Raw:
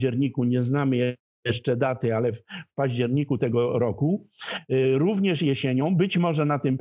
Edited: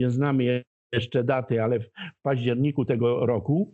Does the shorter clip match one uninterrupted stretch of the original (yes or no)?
yes